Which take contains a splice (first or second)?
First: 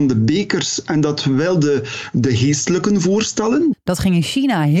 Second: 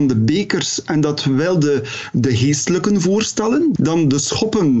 first